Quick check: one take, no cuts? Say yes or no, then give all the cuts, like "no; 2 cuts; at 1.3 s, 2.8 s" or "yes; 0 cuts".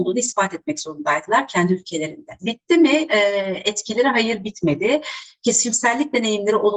no; 1 cut; at 2.4 s